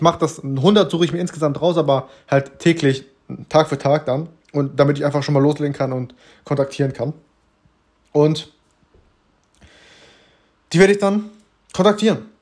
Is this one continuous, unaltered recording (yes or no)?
yes